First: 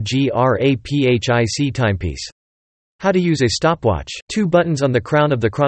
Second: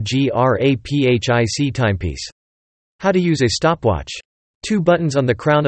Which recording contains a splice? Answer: first; 1 cut; at 4.2 s

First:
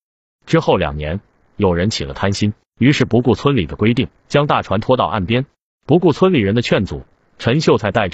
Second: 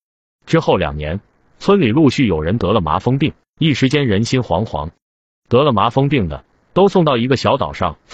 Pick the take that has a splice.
first; 3 cuts; at 1.4 s, 4.1 s, 5.8 s

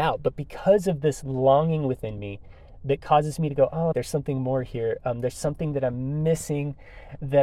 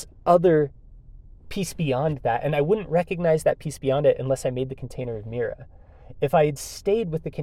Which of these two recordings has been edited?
first; 1 cut; at 3.9 s

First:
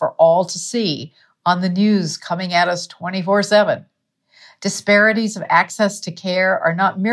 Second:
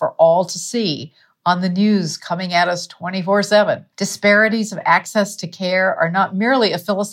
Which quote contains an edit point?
second; 1 cut; at 3.9 s

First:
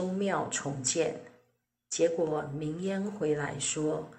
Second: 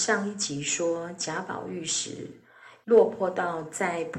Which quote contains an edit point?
second; 1 cut; at 2.8 s

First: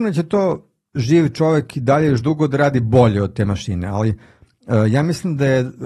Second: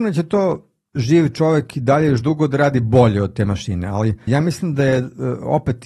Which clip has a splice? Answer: second; 1 cut; at 4.3 s

